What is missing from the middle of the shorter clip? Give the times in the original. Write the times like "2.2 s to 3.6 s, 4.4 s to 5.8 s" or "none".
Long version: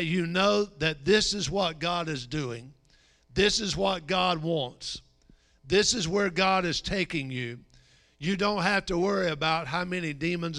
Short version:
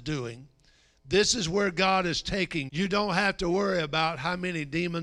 3.2 s to 5.6 s, 7.3 s to 8.2 s

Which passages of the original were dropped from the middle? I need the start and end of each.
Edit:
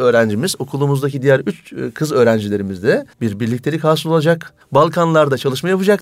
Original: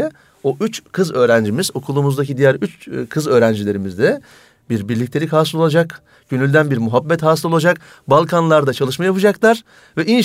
4.3 s to 4.6 s, 6.1 s to 8.0 s

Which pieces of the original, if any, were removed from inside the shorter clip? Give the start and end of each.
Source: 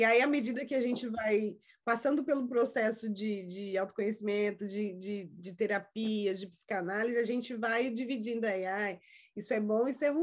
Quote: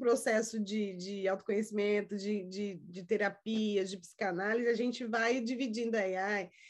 none

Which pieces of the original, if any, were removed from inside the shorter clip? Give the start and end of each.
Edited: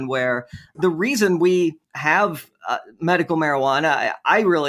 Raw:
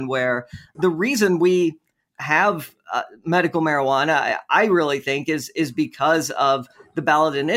1.8 s to 2.1 s

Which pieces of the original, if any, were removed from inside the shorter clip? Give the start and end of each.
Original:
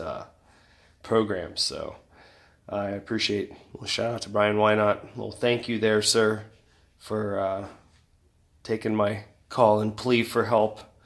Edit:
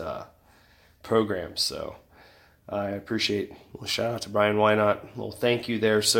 none

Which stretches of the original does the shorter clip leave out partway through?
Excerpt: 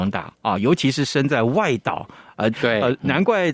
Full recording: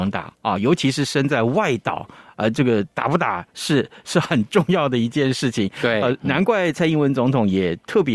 2.5 s to 5.7 s

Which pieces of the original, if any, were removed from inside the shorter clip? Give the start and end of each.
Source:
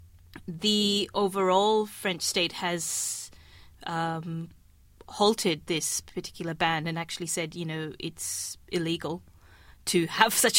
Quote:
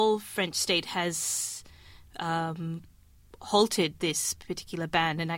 none

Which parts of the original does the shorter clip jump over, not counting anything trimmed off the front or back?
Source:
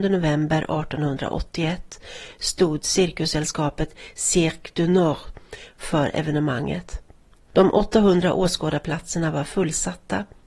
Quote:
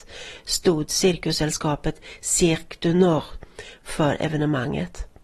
none

